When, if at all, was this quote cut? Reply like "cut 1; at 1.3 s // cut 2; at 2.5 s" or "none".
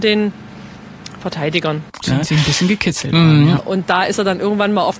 cut 1; at 2.0 s // cut 2; at 3.6 s

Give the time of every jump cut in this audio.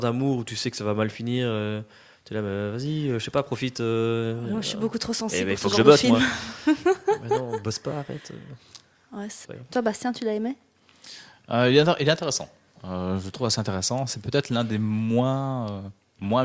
cut 1; at 9.5 s

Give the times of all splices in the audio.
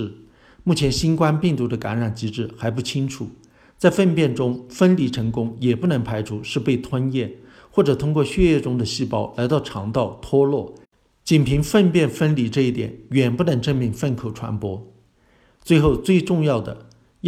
none

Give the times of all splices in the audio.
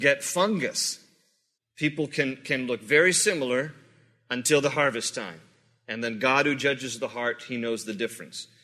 cut 1; at 1.6 s

